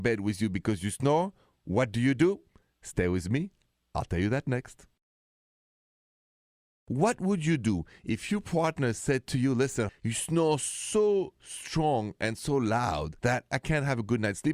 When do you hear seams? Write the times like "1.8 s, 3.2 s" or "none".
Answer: 9.9 s, 13.2 s